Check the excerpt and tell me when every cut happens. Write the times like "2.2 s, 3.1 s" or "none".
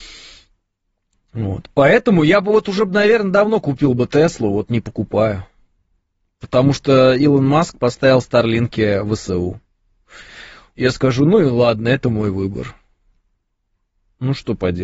10.7 s